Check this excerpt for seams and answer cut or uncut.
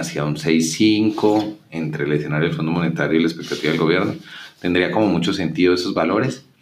uncut